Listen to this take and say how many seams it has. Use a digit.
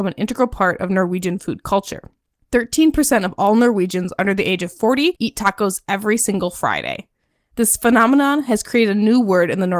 0